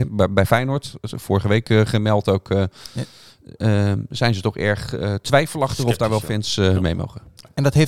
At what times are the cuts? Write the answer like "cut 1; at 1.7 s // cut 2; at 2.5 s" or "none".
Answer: none